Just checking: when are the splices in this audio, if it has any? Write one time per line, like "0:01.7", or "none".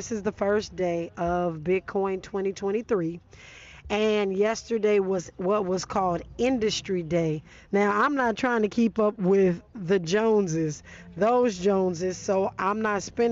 0:07.6